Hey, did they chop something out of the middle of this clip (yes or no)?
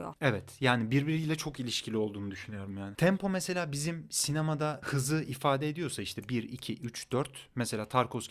no